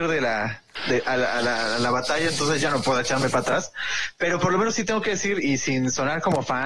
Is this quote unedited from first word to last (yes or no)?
yes